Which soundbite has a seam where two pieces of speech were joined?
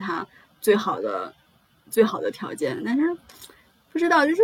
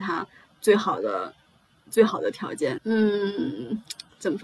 second; 1 cut; at 2.8 s

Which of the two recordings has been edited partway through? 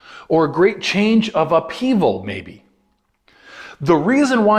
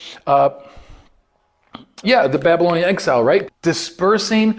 second; 2 cuts; at 2.0 s, 3.5 s

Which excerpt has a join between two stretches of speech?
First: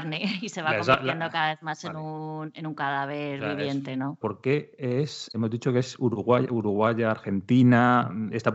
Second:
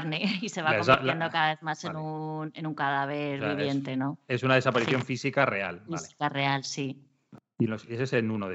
first; 2 cuts; at 4.2 s, 5.3 s

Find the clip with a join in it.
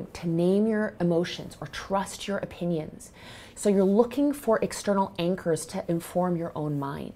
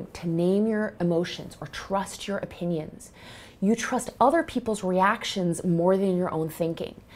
first; 1 cut; at 3.5 s

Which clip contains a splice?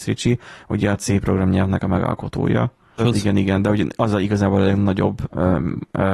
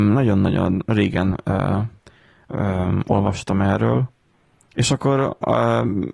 first; 1 cut; at 3.0 s

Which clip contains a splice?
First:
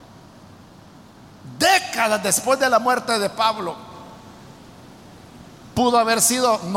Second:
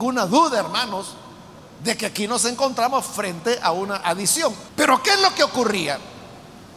second; 1 cut; at 4.7 s

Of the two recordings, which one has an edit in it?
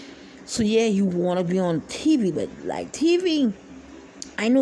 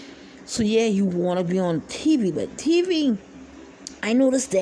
second; 1 cut; at 2.6 s

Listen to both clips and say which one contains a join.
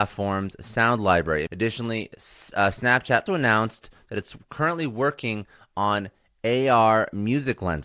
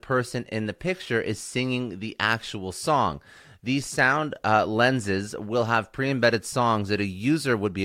first; 2 cuts; at 1.5 s, 3.3 s

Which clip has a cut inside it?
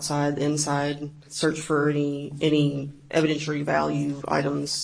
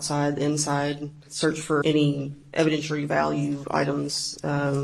second; 1 cut; at 1.8 s

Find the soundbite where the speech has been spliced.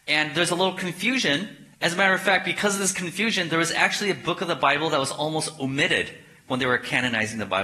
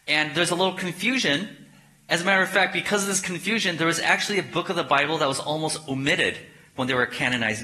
first; 1 cut; at 1.7 s

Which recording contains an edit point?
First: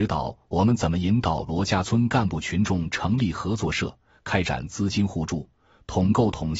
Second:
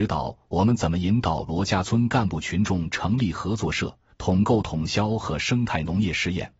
second; 1 cut; at 4.1 s

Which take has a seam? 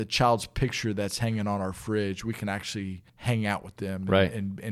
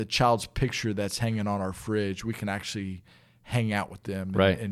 first; 1 cut; at 3.1 s

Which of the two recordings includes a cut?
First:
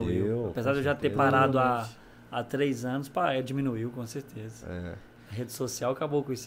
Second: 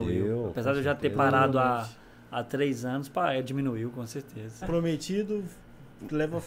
second; 1 cut; at 4.6 s

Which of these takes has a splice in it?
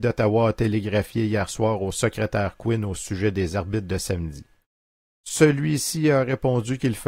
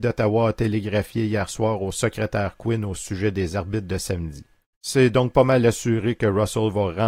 second; 1 cut; at 4.7 s

